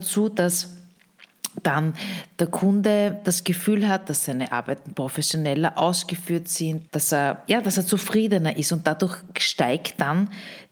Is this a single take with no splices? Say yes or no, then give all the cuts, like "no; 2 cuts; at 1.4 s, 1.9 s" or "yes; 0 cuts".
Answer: no; 1 cut; at 6.9 s